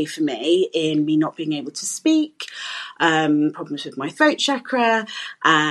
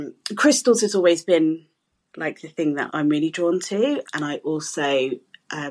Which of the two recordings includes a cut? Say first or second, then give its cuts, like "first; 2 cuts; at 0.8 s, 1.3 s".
second; 2 cuts; at 2.9 s, 4.0 s